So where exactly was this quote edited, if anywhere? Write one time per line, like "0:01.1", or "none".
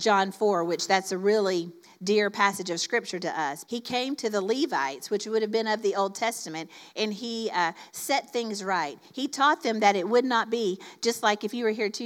0:03.6

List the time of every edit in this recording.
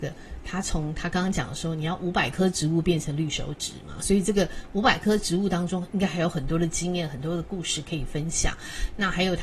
none

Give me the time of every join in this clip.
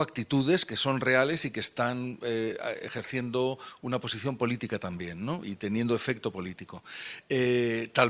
none

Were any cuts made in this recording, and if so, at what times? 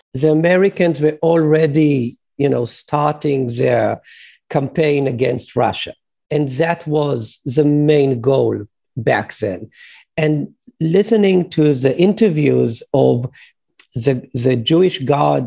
none

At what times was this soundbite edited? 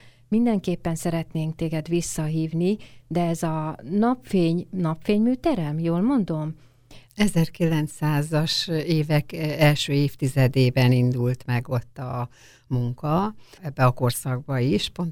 0:07.1
0:13.6

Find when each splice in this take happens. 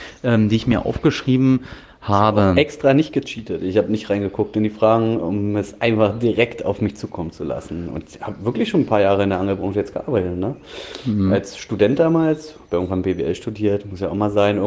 none

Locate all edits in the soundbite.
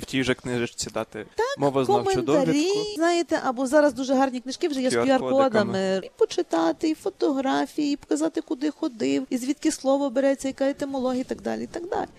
0:06.0

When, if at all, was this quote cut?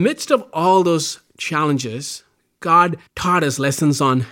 0:03.1

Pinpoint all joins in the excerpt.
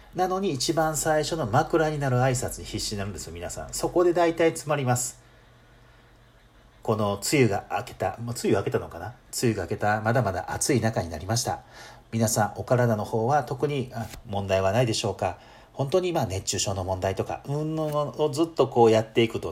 none

